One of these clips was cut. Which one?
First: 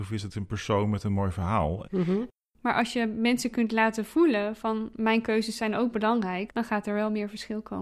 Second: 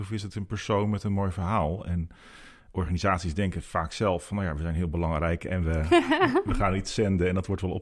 first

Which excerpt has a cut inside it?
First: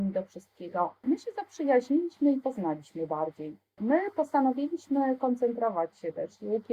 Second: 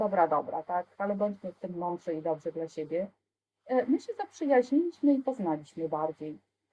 first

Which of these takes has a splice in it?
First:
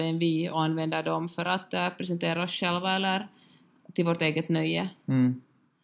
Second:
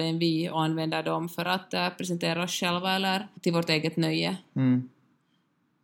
second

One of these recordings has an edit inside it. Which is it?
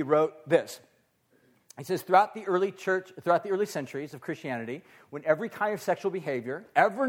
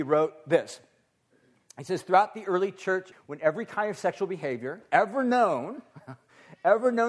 second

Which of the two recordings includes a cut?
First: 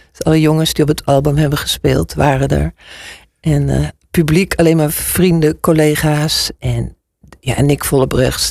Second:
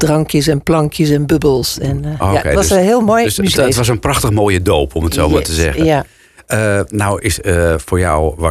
second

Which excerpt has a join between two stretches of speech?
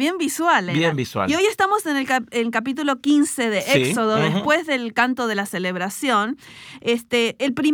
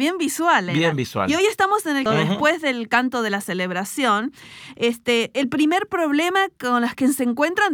second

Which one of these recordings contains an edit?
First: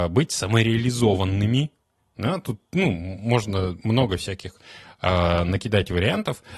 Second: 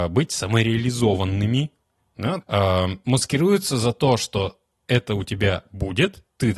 second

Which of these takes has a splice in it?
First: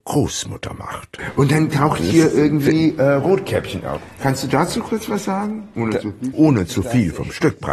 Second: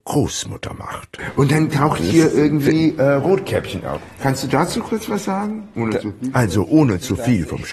first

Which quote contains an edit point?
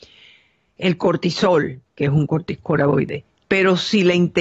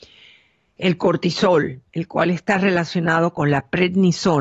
first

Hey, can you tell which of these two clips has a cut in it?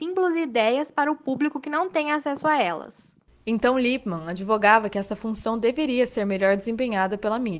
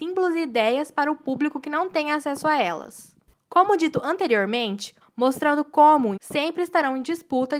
second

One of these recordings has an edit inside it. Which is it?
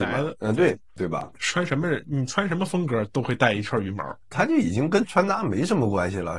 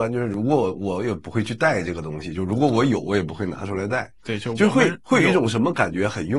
first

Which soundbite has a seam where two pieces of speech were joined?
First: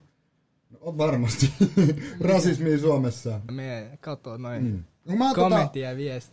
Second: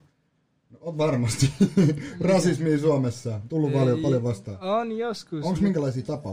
first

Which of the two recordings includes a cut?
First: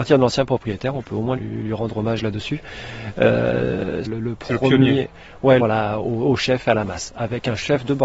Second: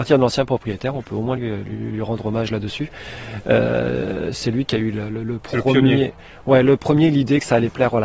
first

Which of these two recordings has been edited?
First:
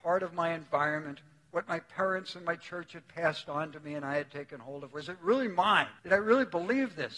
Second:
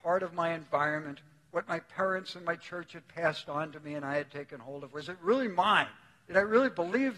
first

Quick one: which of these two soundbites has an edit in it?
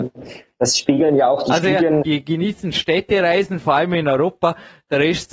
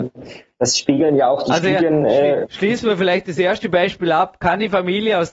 first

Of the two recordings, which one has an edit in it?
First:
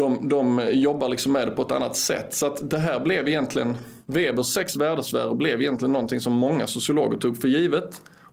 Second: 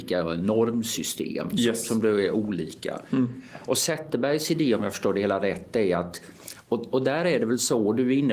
first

